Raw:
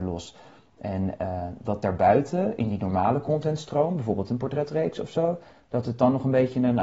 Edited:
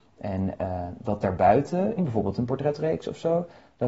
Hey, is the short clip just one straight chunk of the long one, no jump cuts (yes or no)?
no